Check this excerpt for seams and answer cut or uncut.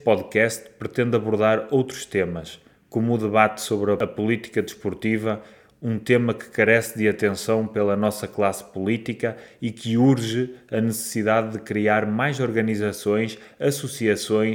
uncut